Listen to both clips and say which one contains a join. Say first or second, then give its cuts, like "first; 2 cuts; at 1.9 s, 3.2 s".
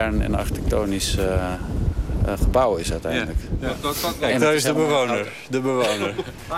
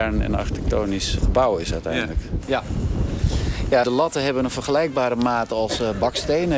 second; 3 cuts; at 1.2 s, 2.4 s, 3.8 s